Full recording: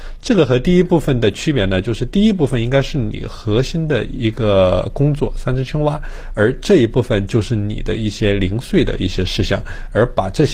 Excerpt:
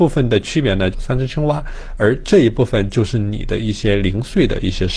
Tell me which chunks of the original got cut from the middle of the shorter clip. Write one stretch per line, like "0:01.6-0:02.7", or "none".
0:01.8-0:05.3